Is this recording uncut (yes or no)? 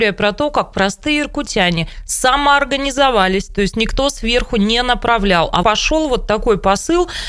no